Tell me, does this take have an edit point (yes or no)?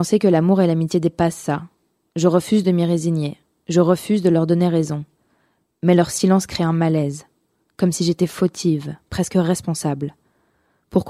no